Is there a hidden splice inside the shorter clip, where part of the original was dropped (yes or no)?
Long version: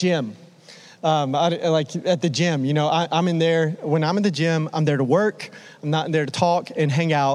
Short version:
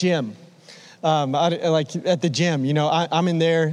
no